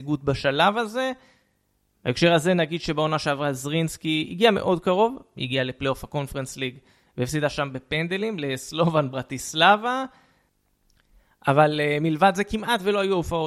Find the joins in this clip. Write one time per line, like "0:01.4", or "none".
none